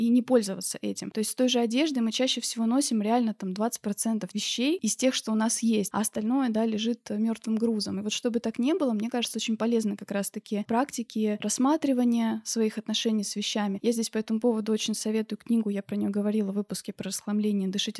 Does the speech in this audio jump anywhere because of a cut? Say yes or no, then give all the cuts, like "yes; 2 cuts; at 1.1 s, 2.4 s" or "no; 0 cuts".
no; 0 cuts